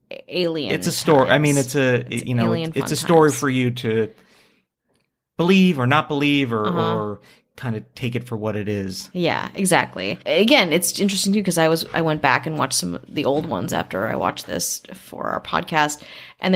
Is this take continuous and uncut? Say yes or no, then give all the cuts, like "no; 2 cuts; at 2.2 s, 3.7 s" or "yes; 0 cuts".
yes; 0 cuts